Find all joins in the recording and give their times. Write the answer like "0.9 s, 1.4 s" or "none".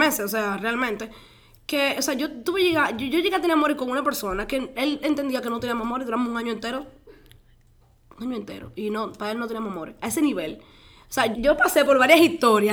11.3 s